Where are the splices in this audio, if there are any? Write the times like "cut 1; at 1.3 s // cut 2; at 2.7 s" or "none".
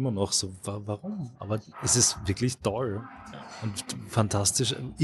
cut 1; at 1.7 s